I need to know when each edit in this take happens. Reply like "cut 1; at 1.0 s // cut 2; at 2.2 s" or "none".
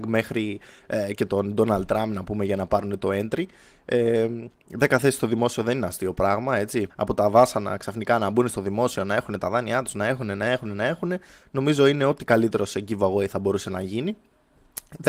cut 1; at 6.9 s